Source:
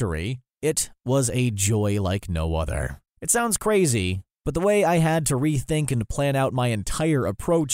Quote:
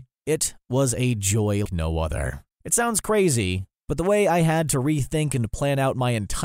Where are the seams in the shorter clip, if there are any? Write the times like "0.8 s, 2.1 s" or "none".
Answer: 1.7 s